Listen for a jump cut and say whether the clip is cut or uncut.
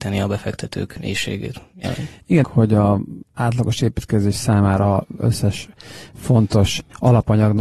cut